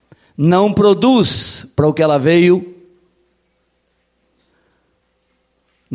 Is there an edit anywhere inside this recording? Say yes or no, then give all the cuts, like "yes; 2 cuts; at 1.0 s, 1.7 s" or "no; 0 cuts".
no; 0 cuts